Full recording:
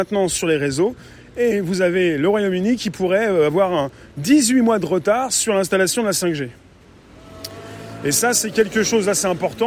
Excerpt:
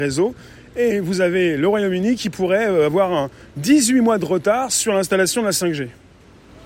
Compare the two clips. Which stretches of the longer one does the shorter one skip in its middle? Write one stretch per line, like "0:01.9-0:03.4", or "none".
none

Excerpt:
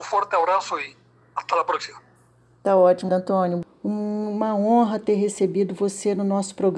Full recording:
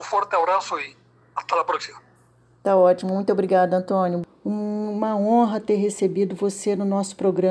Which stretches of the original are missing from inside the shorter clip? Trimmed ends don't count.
0:03.1-0:03.7

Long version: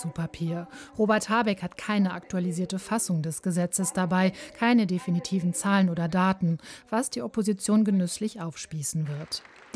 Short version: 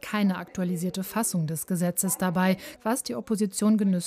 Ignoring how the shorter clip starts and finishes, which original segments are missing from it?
0:04.5-0:06.8

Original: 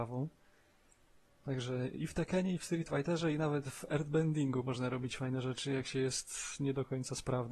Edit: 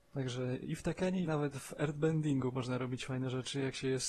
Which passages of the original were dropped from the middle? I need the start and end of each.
0:02.6-0:03.4

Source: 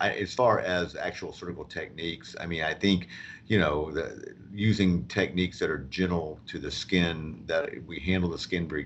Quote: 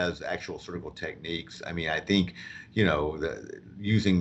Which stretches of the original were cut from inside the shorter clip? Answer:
none

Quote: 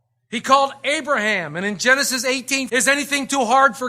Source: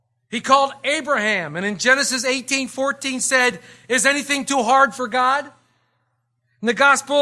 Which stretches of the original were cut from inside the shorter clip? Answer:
0:02.7-0:03.9

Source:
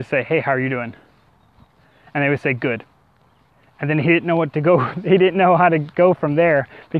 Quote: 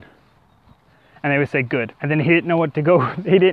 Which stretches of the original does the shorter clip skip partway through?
0:02.9-0:03.7

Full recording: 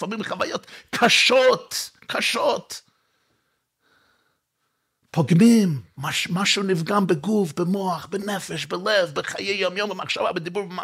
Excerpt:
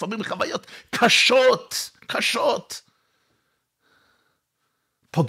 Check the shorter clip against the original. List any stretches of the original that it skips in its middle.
none

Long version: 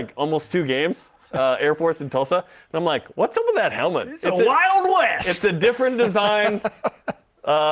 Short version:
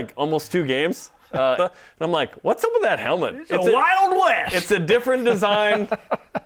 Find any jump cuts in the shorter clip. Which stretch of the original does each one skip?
0:01.6-0:02.3

